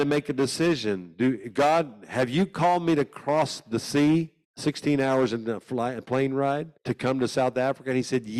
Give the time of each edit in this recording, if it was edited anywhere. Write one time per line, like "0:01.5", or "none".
0:04.4
0:06.8